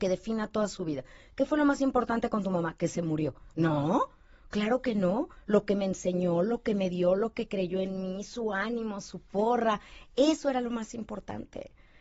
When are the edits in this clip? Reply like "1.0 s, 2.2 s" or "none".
none